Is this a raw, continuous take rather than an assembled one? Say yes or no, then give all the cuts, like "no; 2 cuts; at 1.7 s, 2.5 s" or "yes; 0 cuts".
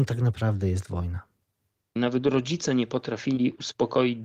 no; 1 cut; at 2.0 s